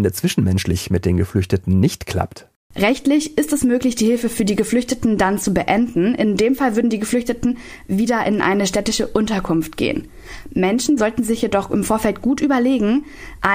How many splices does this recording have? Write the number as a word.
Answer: one